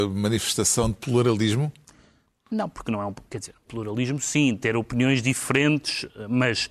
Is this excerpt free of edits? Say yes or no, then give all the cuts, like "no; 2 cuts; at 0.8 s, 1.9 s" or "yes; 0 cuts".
yes; 0 cuts